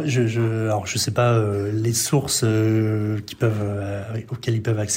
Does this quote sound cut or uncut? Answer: uncut